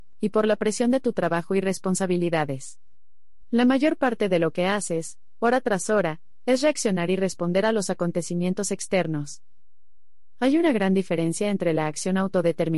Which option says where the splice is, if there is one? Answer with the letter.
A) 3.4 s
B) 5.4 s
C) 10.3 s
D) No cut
A